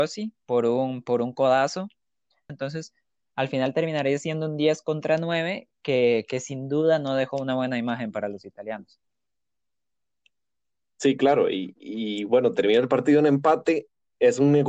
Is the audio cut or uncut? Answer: cut